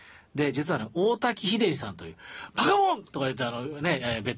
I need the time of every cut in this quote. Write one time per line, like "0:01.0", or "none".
0:03.0